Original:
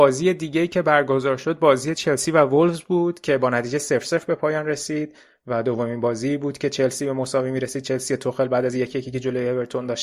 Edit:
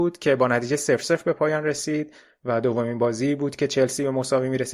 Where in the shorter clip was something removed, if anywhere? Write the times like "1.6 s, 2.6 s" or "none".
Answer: none